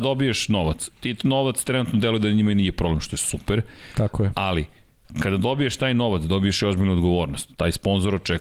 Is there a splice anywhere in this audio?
no; 0 cuts

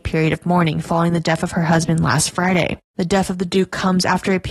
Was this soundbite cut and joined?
yes; 1 cut; at 2.9 s

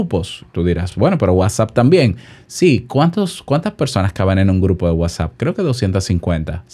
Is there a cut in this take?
no; 0 cuts

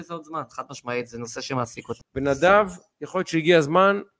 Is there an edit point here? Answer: yes; 1 cut; at 2.0 s

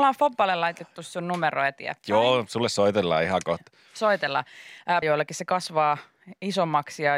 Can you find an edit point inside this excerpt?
yes; 1 cut; at 5.0 s

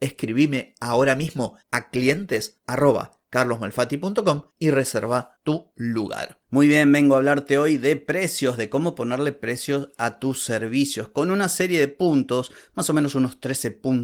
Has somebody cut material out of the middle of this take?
no; 0 cuts

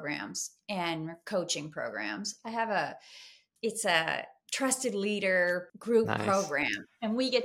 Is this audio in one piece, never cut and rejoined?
no; 2 cuts; at 3.6 s, 5.7 s

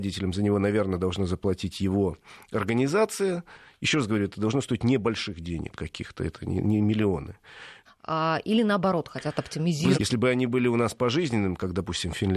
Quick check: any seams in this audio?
yes; 2 cuts; at 7.9 s, 9.9 s

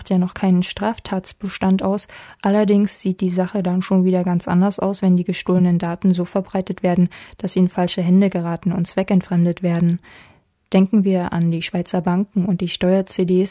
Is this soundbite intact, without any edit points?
yes; 0 cuts

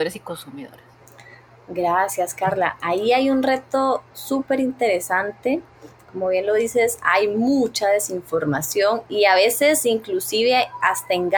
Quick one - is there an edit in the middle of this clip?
no; 0 cuts

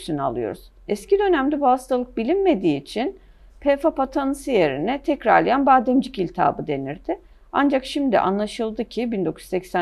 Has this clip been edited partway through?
no; 0 cuts

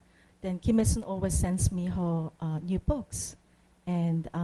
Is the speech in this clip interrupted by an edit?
no; 0 cuts

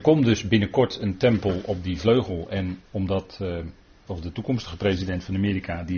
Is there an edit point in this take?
yes; 1 cut; at 4.1 s

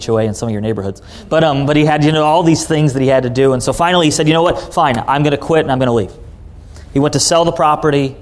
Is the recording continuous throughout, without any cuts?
yes; 0 cuts

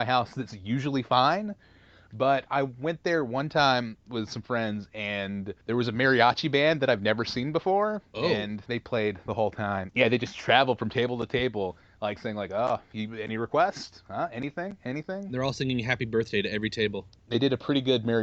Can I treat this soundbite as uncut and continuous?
no; 3 cuts; at 5.6 s, 8.7 s, 9.9 s

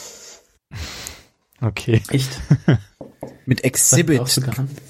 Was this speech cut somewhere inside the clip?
no; 0 cuts

